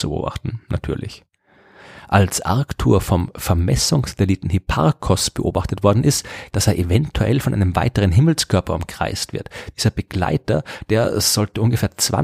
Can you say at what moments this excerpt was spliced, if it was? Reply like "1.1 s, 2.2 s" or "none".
6.5 s